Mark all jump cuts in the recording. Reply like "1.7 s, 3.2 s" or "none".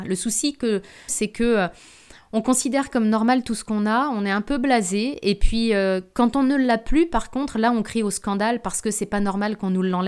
1.1 s